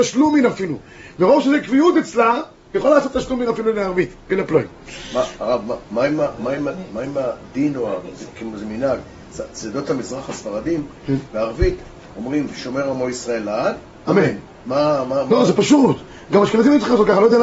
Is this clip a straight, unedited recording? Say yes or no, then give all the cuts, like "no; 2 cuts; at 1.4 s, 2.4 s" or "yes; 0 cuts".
yes; 0 cuts